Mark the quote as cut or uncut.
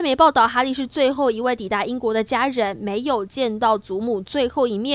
uncut